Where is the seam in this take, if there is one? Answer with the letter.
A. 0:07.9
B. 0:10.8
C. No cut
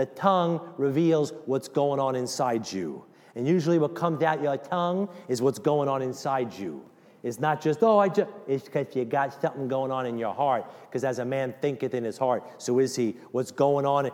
C